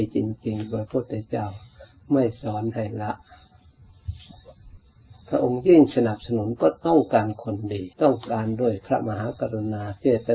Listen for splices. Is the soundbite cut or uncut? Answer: cut